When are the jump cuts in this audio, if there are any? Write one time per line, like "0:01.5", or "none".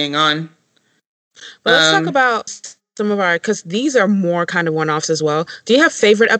0:02.5